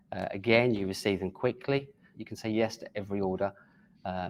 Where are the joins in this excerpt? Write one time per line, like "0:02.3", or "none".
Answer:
0:02.1